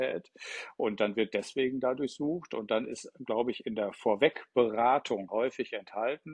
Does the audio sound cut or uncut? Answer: cut